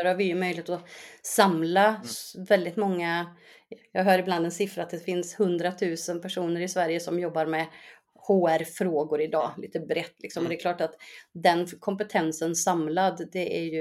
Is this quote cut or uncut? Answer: uncut